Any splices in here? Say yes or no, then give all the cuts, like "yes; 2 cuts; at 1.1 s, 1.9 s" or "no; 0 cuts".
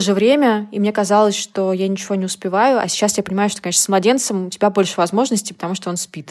no; 0 cuts